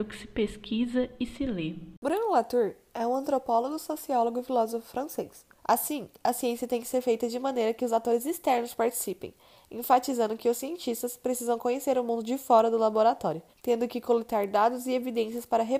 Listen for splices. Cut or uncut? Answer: cut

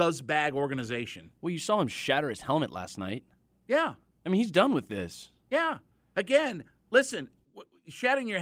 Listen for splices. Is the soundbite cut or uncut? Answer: uncut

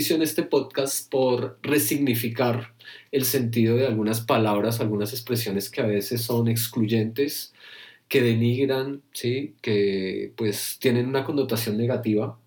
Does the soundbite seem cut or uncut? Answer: uncut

